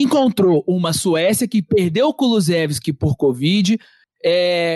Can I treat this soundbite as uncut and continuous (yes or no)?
yes